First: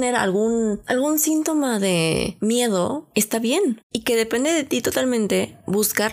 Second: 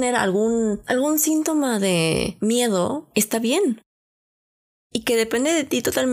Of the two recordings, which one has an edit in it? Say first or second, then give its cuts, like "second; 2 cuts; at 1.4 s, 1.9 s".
first; 1 cut; at 3.8 s